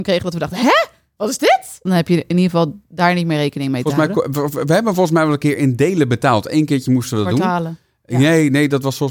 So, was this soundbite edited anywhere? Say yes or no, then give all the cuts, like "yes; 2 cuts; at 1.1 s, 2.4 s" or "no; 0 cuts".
yes; 1 cut; at 1.9 s